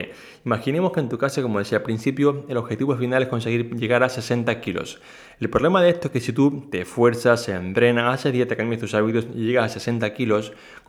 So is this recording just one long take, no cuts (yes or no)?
yes